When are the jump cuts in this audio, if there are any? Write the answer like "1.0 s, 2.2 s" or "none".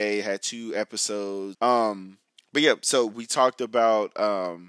1.5 s